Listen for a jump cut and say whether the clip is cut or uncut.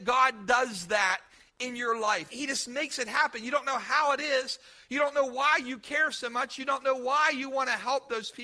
uncut